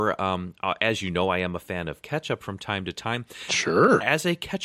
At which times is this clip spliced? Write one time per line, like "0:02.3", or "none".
none